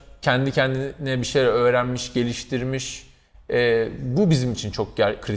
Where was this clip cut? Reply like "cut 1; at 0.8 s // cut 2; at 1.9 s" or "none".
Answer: none

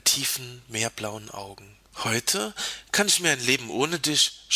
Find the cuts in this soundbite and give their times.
cut 1; at 1.9 s

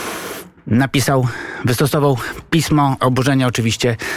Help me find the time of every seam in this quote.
cut 1; at 3.0 s

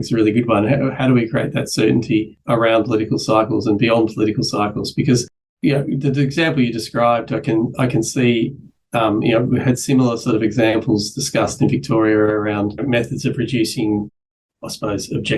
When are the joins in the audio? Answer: cut 1; at 6.0 s

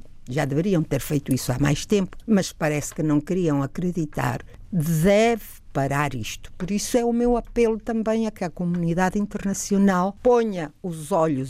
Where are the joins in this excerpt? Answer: cut 1; at 2.2 s // cut 2; at 4.7 s

